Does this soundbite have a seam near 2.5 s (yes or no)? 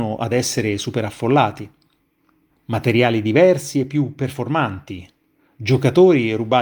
yes